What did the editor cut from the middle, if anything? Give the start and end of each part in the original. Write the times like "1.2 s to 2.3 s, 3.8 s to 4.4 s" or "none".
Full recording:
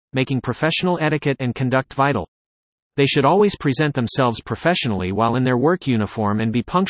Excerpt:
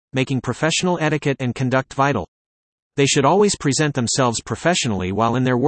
none